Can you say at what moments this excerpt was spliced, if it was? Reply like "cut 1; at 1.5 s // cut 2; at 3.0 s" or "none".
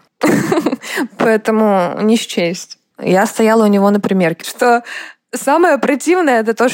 cut 1; at 2.9 s // cut 2; at 4.4 s